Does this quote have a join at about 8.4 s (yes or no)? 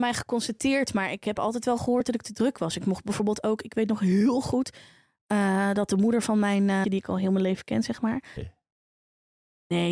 yes